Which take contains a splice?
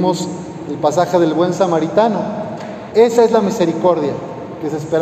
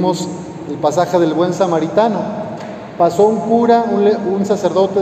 first; 1 cut; at 2.9 s

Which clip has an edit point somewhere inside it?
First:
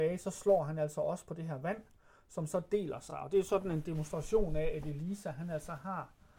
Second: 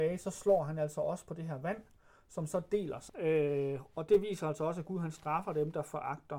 second; 1 cut; at 3.1 s

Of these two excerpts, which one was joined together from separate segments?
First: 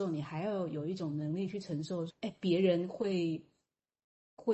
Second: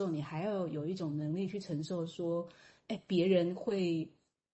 first; 1 cut; at 2.1 s

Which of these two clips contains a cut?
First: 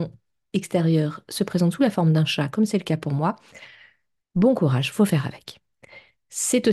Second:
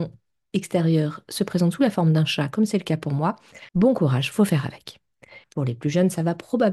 second; 2 cuts; at 3.7 s, 5.4 s

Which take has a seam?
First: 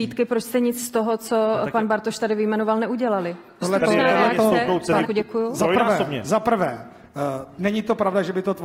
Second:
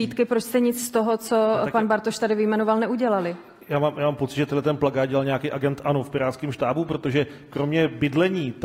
first; 2 cuts; at 3.6 s, 5.0 s

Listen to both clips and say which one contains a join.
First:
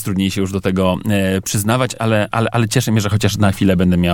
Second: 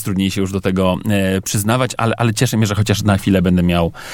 second; 1 cut; at 2.0 s

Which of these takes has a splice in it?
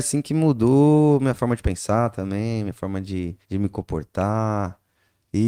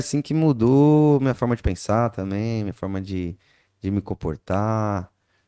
first; 1 cut; at 3.4 s

